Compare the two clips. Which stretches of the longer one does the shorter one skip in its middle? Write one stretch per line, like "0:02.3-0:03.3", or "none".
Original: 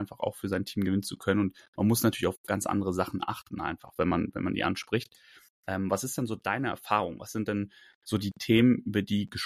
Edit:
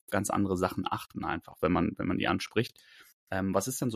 none

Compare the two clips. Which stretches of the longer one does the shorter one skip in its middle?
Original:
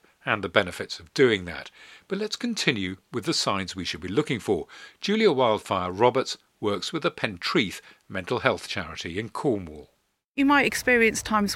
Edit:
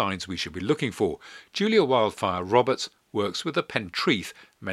none

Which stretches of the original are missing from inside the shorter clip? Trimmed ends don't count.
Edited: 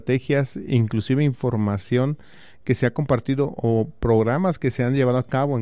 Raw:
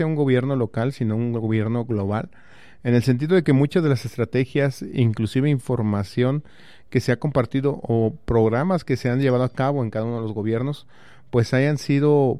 none

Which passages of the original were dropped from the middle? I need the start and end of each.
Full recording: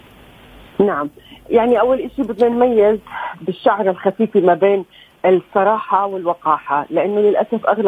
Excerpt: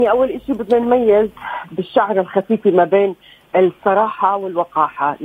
none

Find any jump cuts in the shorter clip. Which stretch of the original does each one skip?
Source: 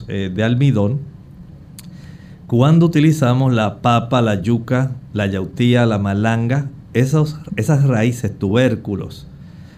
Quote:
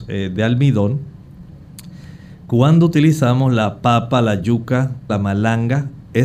0:05.1-0:05.9

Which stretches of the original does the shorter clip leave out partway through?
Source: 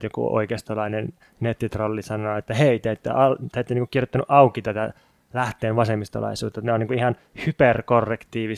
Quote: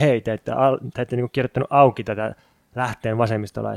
none

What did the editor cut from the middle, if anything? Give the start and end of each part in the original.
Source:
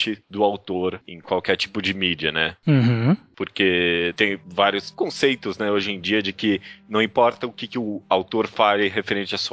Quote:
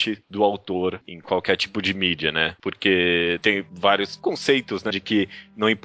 0:02.6-0:03.3
0:05.6-0:06.2

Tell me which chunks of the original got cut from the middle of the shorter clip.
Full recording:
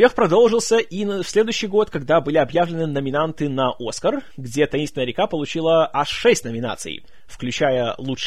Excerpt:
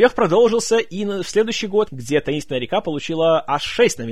0:01.9-0:04.3

